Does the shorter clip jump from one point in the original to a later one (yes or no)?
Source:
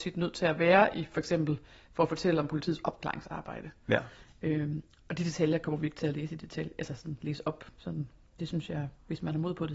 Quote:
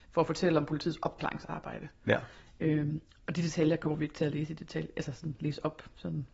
no